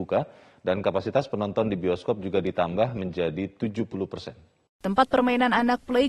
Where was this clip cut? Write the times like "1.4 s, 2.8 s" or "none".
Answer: 4.7 s